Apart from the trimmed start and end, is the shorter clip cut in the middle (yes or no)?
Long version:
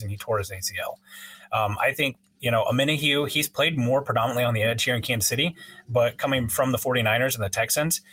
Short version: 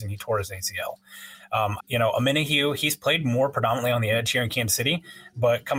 yes